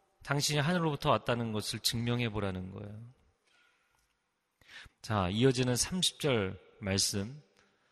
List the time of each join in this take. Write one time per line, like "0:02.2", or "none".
0:04.9